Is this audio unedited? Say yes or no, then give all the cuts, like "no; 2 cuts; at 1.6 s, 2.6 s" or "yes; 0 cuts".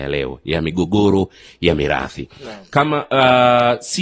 yes; 0 cuts